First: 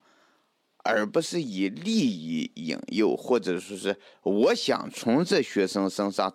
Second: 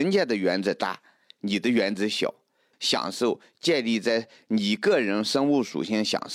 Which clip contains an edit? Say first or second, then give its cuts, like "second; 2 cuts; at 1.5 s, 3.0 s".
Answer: second; 1 cut; at 2.7 s